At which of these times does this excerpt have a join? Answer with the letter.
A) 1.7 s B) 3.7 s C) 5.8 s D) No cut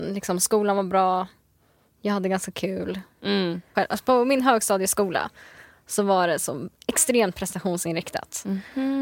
B